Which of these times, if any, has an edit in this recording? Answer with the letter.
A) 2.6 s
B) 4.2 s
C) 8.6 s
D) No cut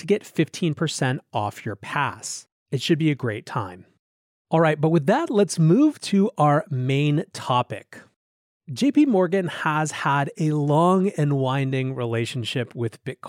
D